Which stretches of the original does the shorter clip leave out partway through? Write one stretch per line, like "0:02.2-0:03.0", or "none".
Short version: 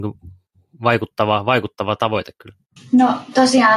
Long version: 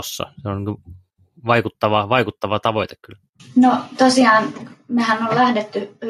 none